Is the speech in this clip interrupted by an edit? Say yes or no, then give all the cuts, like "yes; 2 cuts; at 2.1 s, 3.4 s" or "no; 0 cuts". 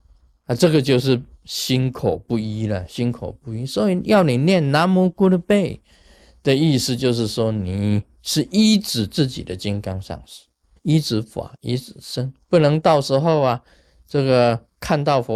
yes; 2 cuts; at 10.8 s, 12.4 s